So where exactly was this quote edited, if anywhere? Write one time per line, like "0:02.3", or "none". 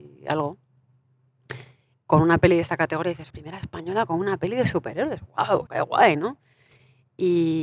0:03.3
0:05.7